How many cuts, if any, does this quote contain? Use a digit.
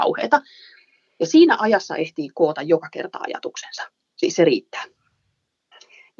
0